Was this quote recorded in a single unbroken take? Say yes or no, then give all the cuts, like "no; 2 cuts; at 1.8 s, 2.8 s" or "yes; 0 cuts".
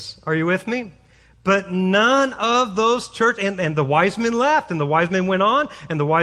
yes; 0 cuts